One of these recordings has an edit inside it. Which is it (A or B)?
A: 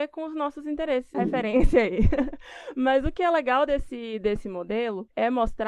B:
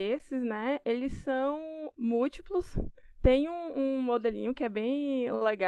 A